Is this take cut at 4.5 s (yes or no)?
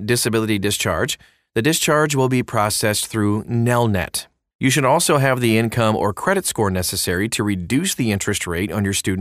yes